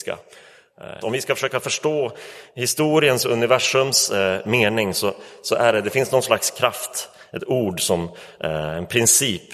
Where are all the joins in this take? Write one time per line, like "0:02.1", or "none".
0:01.0

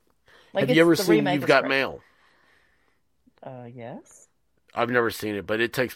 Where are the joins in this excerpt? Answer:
none

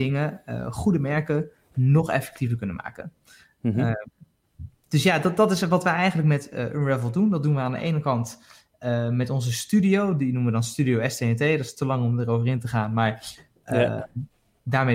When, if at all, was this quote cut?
0:04.8

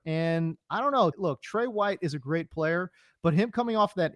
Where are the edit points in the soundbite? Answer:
0:01.1

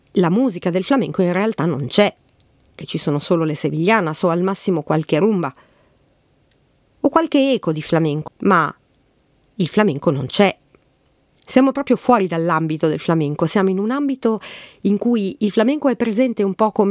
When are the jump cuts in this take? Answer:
0:08.3

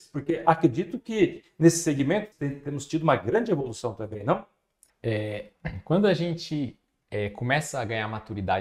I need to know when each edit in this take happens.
0:02.3
0:04.9

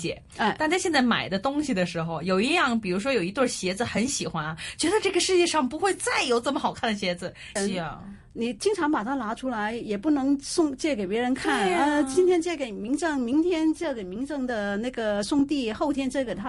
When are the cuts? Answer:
0:07.6

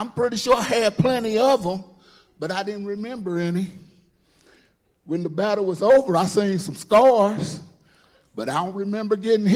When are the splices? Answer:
none

